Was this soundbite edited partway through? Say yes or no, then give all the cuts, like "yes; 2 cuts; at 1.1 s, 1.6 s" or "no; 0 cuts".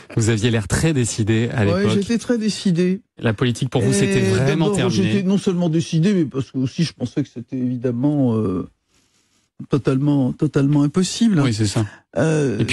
no; 0 cuts